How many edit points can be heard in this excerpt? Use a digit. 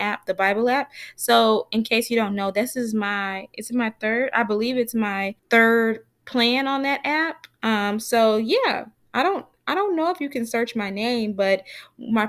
1